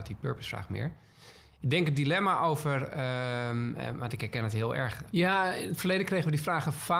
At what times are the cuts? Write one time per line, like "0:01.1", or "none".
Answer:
0:05.1